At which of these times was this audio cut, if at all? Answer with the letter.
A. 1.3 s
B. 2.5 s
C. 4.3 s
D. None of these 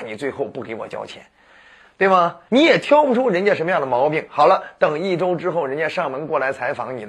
B